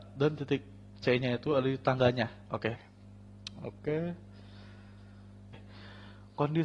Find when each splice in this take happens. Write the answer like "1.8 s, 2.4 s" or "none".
2.7 s, 5.5 s